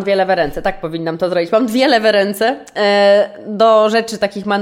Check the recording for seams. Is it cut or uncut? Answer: uncut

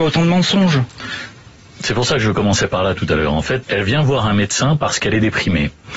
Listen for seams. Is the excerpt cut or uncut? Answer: cut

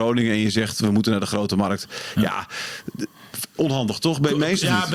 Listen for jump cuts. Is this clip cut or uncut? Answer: uncut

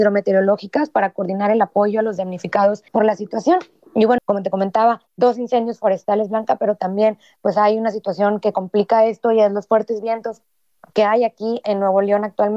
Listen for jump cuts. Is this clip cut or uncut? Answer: cut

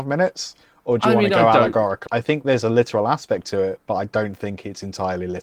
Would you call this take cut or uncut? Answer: cut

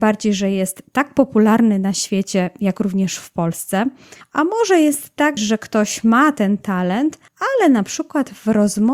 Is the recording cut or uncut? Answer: cut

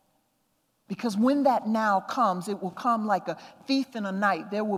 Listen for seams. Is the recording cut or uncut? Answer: uncut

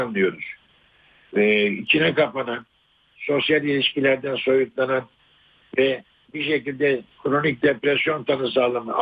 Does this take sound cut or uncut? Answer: uncut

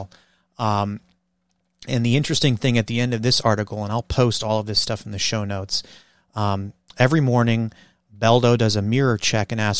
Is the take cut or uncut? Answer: uncut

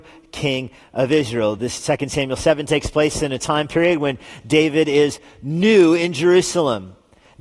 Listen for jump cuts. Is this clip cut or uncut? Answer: uncut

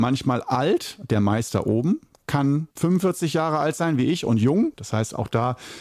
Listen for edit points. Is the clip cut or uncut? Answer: cut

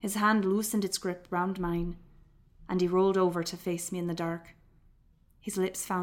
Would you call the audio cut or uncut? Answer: uncut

